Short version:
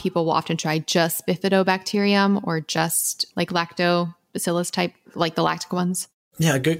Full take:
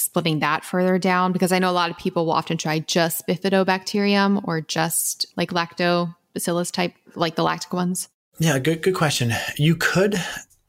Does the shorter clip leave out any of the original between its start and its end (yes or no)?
no